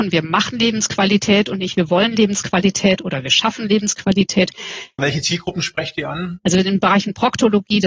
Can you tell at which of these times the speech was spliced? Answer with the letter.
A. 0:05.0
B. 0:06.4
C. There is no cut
A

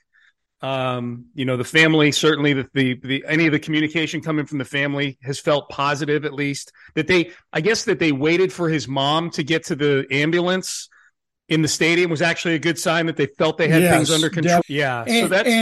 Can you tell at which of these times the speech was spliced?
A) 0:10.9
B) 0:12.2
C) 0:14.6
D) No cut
C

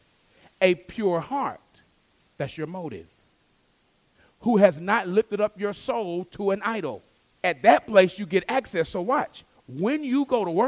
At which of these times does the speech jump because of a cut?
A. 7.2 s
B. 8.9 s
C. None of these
A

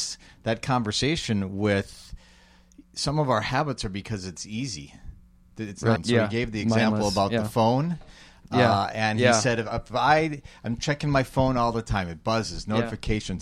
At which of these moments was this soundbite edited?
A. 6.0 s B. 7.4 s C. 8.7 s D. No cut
A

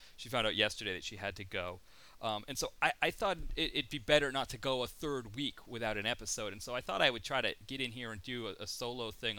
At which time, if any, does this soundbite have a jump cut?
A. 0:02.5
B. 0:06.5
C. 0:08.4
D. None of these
D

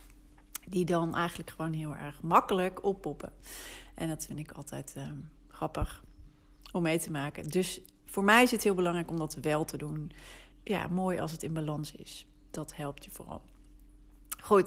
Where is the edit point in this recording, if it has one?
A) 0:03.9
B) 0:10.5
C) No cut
B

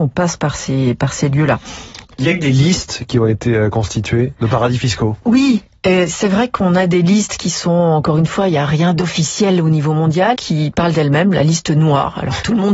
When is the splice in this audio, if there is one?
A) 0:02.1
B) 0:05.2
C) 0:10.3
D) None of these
C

